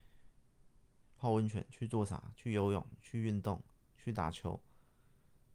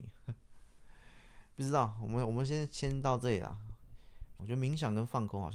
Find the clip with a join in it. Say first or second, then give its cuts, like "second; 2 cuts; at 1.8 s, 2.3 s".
second; 1 cut; at 4.4 s